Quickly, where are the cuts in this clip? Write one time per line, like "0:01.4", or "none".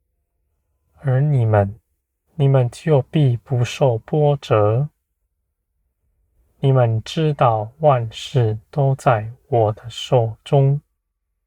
0:02.3